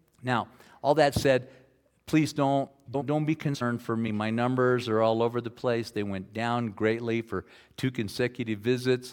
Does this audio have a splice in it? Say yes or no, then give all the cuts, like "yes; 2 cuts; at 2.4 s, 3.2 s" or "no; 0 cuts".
no; 0 cuts